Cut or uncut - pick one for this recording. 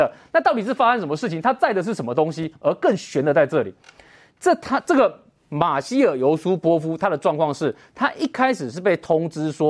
uncut